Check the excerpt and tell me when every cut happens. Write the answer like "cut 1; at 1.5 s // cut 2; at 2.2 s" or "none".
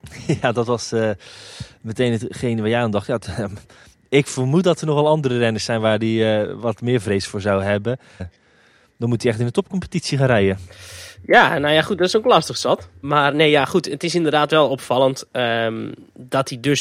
cut 1; at 8.2 s // cut 2; at 13.0 s